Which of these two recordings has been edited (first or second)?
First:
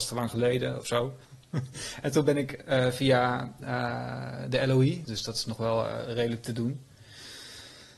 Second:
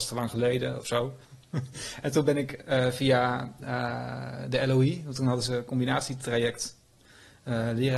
first